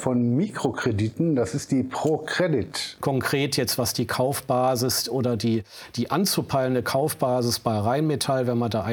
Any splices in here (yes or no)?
yes